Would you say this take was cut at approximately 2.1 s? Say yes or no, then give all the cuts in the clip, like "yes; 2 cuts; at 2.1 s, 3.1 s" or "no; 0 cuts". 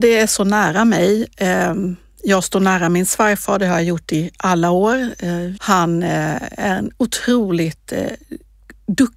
no; 1 cut; at 5.6 s